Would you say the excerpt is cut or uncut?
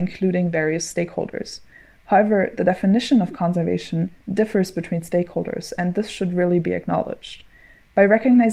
uncut